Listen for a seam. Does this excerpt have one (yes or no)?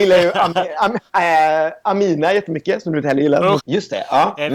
yes